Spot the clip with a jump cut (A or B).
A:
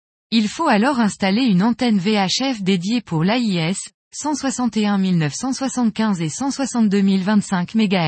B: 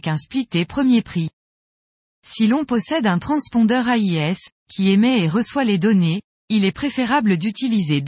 A